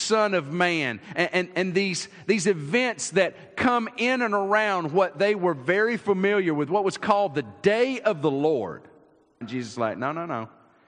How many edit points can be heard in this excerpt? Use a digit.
1